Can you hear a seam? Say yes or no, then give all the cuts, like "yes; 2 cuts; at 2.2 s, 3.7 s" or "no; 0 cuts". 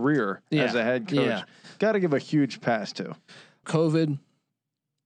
yes; 1 cut; at 3.6 s